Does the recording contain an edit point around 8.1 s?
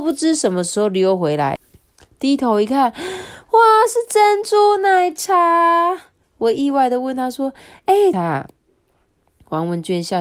yes; 2 cuts; at 1.6 s, 8.1 s

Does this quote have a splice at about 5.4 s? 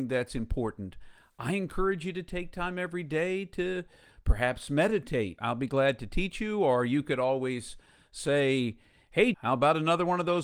yes; 2 cuts; at 5.4 s, 9.3 s

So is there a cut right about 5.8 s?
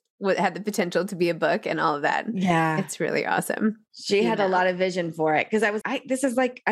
yes; 2 cuts; at 3.9 s, 5.8 s

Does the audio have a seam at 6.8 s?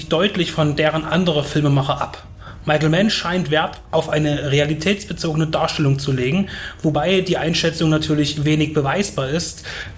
no; 0 cuts

